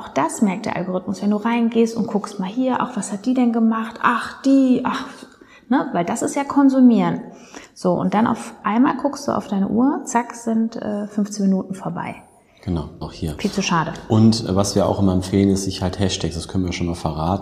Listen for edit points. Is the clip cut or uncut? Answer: cut